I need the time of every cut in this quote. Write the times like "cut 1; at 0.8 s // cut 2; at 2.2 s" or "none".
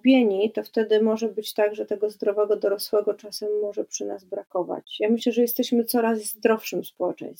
none